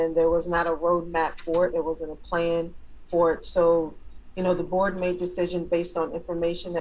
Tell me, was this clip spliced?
no; 0 cuts

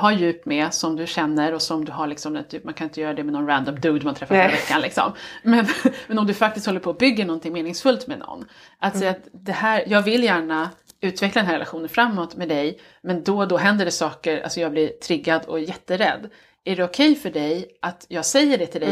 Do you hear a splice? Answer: no; 0 cuts

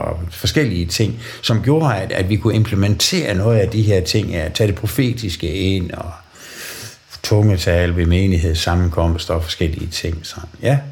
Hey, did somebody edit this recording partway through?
no; 0 cuts

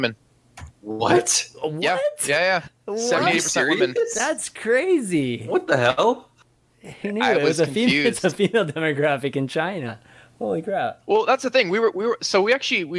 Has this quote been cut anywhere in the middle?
no; 0 cuts

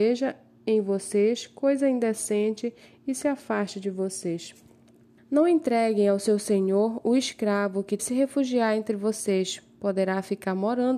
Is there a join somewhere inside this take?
yes; 2 cuts; at 5.2 s, 8.0 s

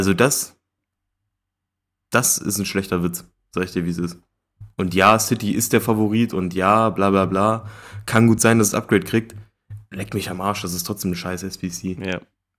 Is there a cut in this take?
no; 0 cuts

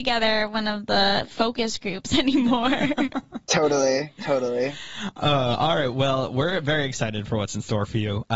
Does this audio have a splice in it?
no; 0 cuts

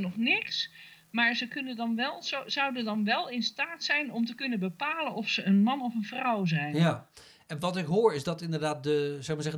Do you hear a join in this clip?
no; 0 cuts

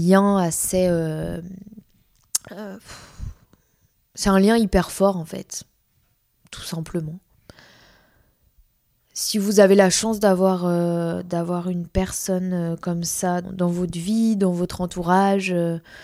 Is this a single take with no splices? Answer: no; 1 cut; at 13.4 s

